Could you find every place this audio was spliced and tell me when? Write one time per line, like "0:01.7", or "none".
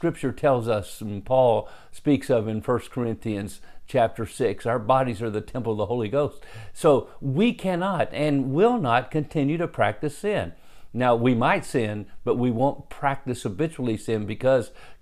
none